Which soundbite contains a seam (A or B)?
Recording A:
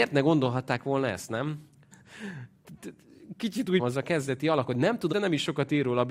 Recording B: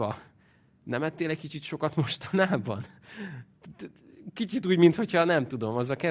A